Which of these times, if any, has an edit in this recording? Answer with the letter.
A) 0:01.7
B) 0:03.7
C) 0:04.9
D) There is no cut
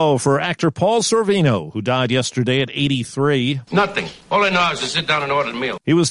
B